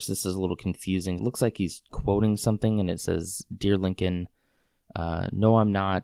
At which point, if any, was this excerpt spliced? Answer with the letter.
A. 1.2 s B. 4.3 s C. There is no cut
A